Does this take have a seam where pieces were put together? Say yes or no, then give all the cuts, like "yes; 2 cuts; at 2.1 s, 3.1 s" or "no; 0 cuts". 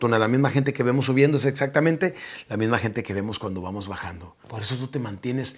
yes; 1 cut; at 4.4 s